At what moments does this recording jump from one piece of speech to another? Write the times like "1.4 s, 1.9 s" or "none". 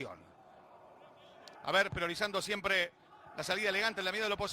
1.6 s

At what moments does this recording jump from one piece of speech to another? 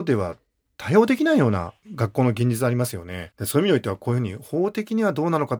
3.3 s

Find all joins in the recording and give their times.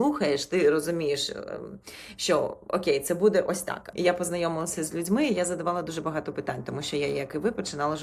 3.9 s

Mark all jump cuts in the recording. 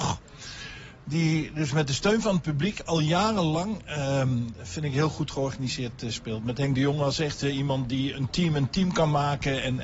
8.1 s

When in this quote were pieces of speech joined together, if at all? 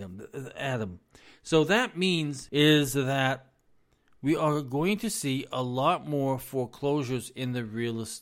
2.5 s

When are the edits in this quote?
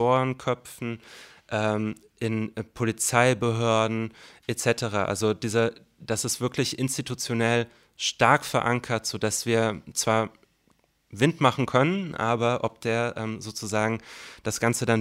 none

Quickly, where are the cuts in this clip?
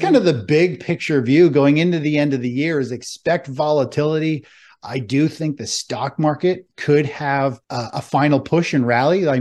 7.6 s

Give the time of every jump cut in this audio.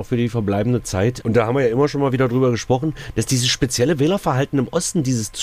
1.2 s

